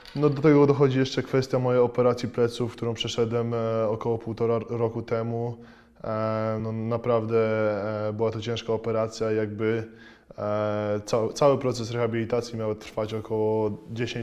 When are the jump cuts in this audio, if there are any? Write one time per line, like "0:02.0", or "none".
none